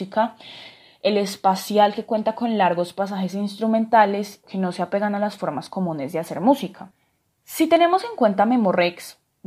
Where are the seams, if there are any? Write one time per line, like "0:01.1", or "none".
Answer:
0:04.4